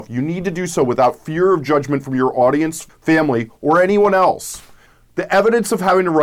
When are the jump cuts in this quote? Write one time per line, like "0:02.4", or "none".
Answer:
0:02.9